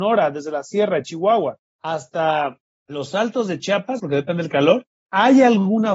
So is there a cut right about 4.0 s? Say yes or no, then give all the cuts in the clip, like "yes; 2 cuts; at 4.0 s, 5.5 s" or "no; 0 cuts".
yes; 1 cut; at 4.0 s